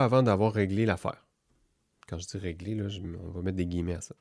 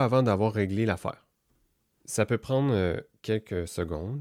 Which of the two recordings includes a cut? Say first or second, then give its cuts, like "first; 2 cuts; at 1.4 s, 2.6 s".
second; 1 cut; at 2.0 s